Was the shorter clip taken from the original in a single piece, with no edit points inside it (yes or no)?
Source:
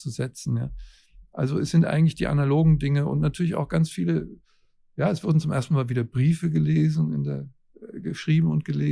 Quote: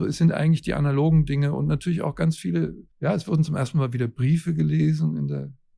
no